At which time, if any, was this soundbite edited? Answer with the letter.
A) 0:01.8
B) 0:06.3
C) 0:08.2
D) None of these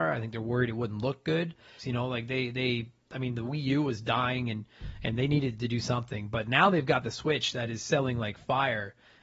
A